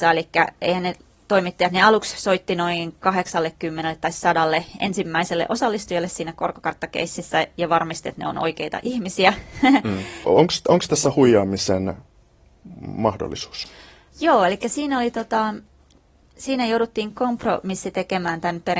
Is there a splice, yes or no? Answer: yes